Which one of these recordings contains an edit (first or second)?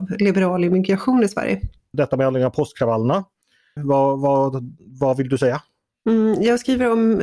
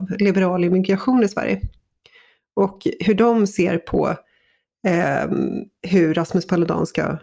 first